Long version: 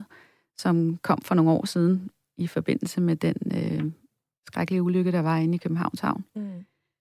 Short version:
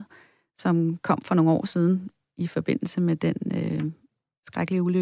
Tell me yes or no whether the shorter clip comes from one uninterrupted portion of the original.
yes